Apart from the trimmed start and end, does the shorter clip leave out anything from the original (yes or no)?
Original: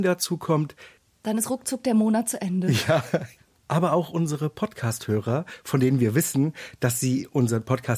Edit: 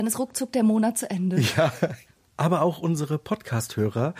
no